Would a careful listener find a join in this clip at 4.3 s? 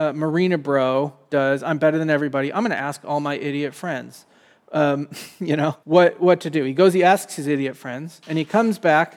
no; 1 cut; at 5.8 s

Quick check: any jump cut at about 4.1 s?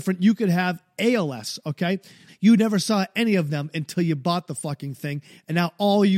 no; 1 cut; at 2.3 s

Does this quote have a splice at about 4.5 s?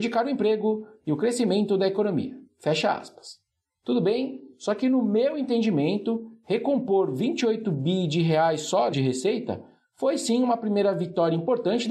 no; 1 cut; at 8.9 s

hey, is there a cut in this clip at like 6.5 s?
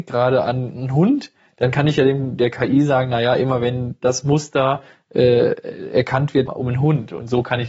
yes; 1 cut; at 6.5 s

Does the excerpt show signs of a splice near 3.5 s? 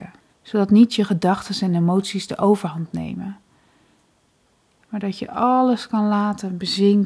no; 0 cuts

